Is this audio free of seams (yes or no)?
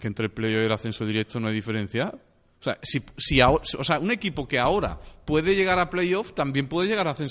yes